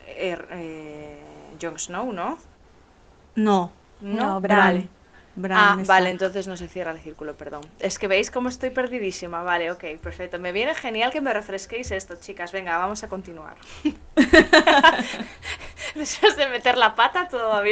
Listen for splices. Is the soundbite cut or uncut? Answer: uncut